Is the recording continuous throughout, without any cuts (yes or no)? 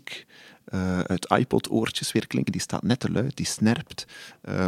yes